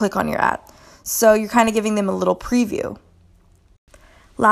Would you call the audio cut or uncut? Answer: uncut